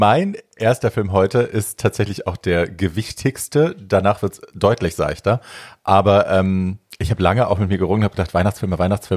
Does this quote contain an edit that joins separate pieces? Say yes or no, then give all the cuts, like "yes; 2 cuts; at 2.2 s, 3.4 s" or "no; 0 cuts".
no; 0 cuts